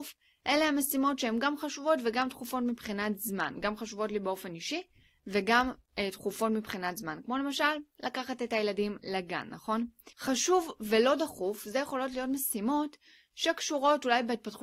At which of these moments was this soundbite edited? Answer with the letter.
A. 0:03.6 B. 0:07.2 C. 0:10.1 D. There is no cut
C